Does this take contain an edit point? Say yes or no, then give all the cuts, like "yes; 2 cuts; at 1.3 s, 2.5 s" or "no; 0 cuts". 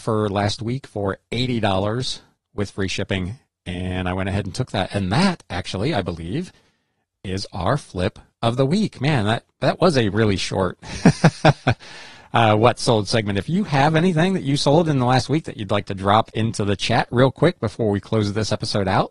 no; 0 cuts